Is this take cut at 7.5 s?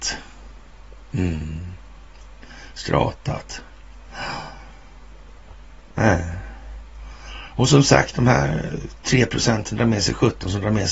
no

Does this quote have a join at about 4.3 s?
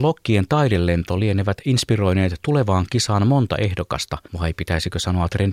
yes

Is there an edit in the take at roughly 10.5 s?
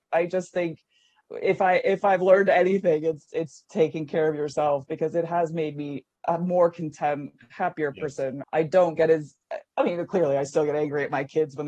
no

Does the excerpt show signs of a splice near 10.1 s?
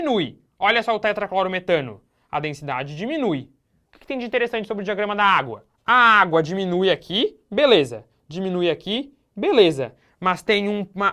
no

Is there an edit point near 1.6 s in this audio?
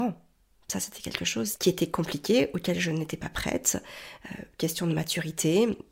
yes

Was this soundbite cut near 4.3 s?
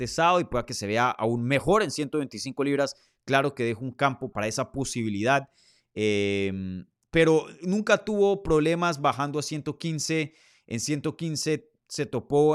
yes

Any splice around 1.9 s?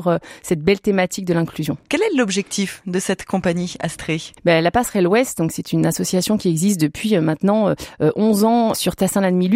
yes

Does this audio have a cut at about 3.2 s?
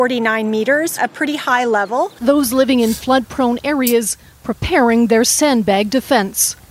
no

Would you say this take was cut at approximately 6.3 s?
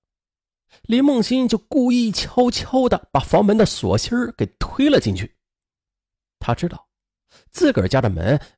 no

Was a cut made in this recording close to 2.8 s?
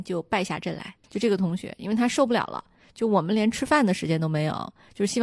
no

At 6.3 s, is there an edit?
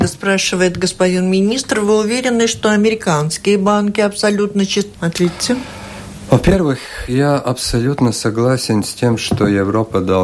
no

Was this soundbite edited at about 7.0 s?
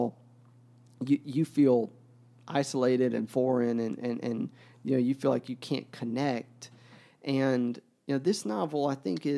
no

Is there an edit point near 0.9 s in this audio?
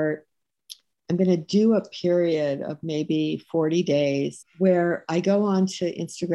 no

